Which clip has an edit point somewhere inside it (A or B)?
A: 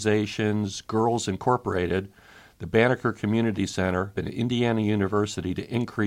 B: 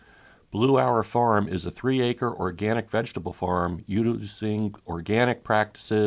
A